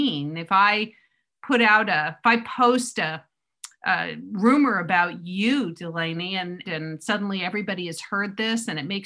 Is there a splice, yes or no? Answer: yes